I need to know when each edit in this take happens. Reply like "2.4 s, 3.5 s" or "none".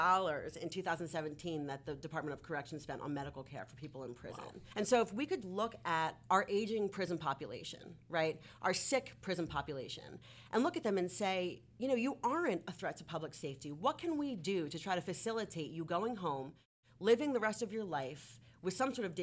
5.4 s